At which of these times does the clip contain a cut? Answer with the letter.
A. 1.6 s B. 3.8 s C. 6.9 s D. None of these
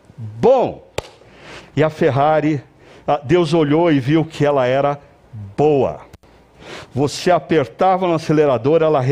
A